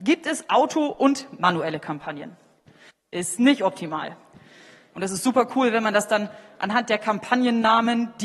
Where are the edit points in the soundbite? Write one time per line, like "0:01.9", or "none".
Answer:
0:02.9
0:04.9